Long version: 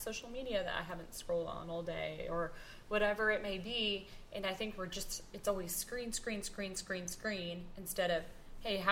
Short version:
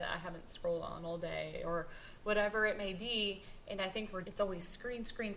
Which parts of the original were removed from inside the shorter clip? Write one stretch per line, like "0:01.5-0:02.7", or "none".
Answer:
0:04.9-0:05.3